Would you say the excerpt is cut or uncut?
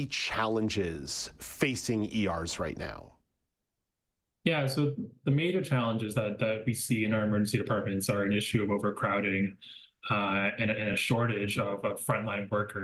uncut